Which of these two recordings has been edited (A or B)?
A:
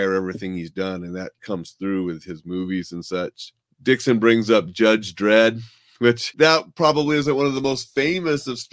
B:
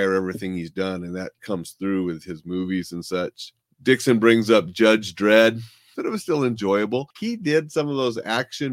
B